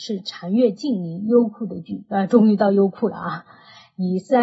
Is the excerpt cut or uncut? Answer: uncut